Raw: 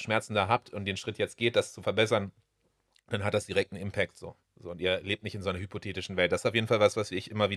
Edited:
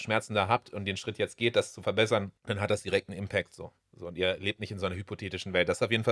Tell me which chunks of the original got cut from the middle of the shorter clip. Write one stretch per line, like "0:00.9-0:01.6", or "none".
0:02.4-0:03.0